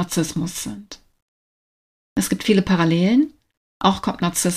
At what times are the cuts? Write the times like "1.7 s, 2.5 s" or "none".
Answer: 2.0 s